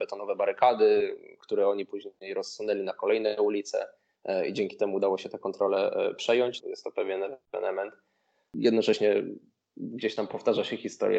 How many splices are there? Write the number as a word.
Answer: one